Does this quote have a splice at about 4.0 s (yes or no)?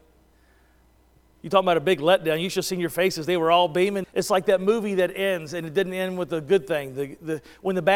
yes